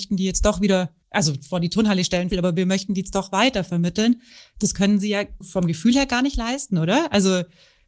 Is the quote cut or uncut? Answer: cut